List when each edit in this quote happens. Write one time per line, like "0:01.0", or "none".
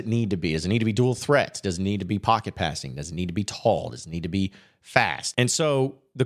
0:05.3